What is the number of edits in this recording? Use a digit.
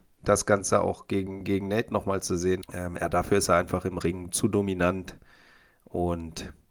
1